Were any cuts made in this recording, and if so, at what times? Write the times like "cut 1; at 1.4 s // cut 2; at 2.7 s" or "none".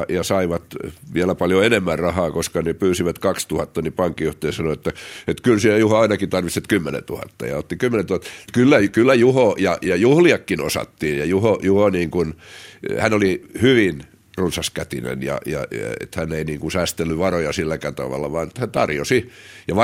cut 1; at 8.4 s